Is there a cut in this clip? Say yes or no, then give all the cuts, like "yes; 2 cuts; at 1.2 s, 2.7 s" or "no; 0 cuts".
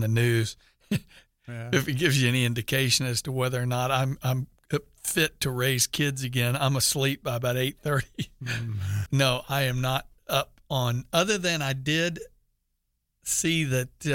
yes; 1 cut; at 9.1 s